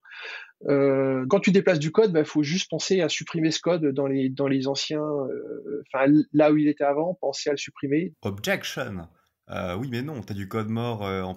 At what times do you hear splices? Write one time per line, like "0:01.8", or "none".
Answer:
0:01.3
0:08.1